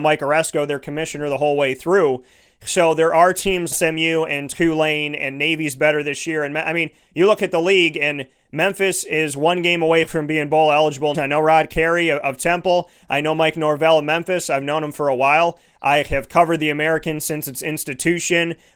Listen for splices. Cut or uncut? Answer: cut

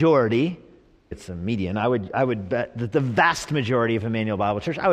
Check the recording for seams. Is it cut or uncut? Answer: cut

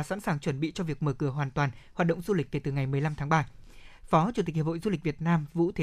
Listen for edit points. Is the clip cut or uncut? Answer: cut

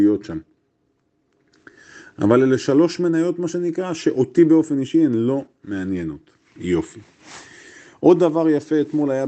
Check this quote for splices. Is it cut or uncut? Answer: uncut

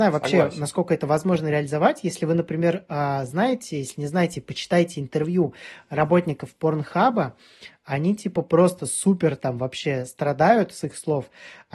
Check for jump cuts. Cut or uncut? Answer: uncut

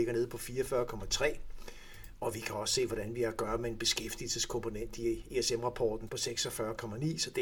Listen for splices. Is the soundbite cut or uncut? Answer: cut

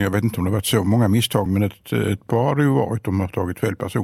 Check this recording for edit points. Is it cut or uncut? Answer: uncut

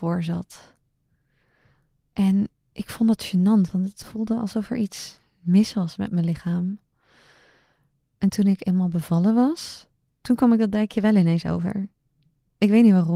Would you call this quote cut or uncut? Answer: uncut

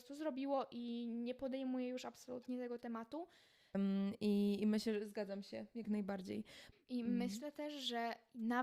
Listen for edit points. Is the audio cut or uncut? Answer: cut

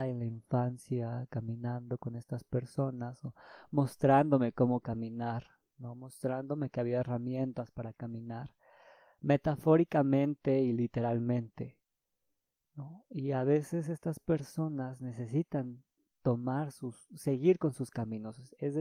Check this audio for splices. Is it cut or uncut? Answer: uncut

